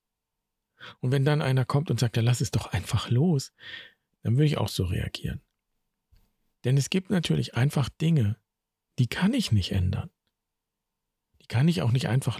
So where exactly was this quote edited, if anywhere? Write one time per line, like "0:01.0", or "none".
none

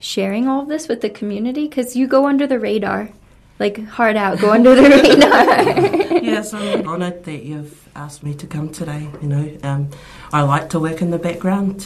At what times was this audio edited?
0:06.8

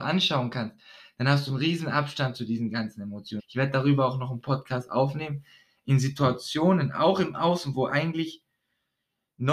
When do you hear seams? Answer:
0:03.4

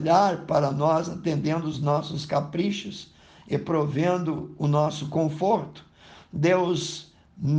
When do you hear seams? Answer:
none

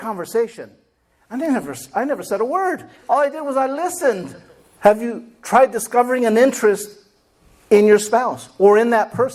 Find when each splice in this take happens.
0:04.8

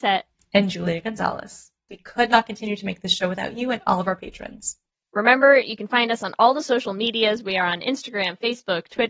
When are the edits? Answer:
0:01.9

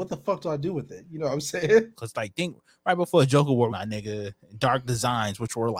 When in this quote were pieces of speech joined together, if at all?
0:01.9
0:03.7

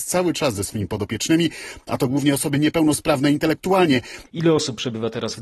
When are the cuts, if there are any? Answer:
0:04.3

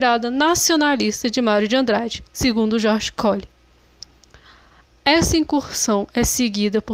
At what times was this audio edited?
none

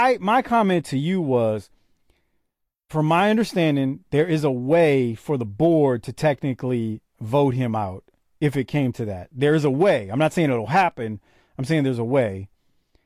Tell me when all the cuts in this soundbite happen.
none

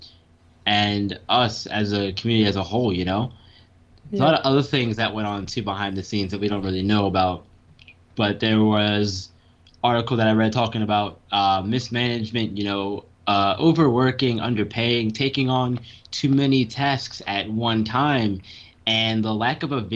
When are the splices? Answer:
none

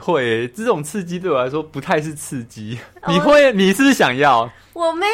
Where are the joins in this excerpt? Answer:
none

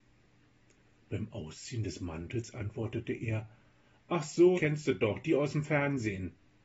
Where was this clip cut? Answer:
0:04.6

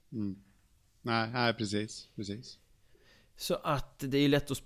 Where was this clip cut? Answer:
none

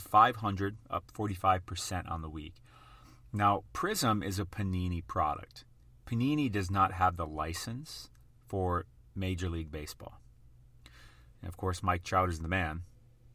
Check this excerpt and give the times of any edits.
0:11.3

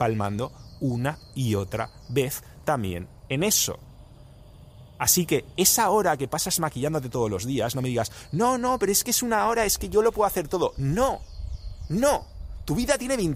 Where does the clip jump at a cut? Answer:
none

